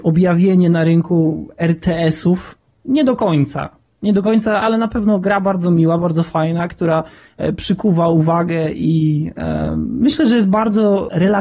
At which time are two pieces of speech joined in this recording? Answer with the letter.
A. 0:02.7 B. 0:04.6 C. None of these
B